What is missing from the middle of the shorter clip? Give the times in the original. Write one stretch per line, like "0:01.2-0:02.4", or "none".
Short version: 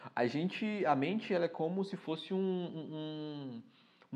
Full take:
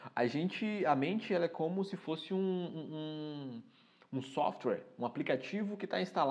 none